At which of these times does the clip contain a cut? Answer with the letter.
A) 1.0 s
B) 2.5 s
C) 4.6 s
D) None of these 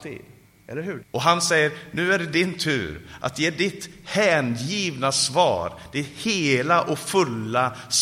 A